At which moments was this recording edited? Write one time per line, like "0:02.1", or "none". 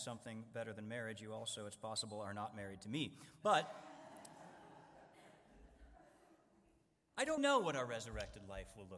0:07.4